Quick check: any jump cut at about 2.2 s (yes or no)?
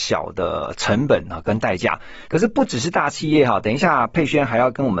yes